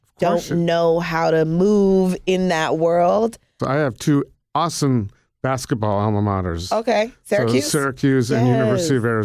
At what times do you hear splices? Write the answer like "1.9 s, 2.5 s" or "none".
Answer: 3.6 s